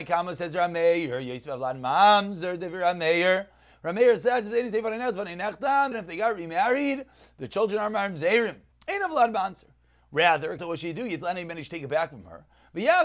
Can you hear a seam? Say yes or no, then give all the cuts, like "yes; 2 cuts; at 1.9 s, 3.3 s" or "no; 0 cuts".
yes; 3 cuts; at 5.9 s, 8.7 s, 10.6 s